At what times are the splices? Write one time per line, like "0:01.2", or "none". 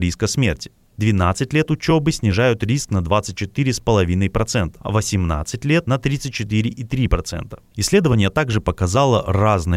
0:07.7